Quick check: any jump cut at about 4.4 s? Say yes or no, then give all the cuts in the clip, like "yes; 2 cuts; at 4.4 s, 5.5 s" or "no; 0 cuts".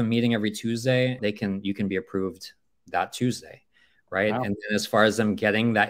no; 1 cut; at 1.2 s